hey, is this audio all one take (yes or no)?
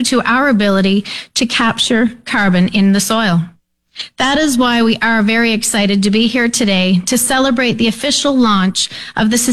yes